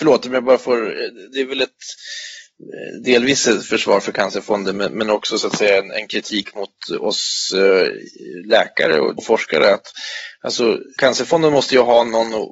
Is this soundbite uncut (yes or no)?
no